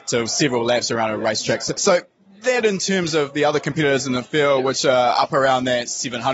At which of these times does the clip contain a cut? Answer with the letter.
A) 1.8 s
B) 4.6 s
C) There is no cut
A